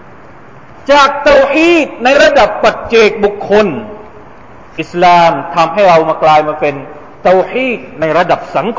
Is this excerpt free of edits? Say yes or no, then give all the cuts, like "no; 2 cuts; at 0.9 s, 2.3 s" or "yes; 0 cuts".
yes; 0 cuts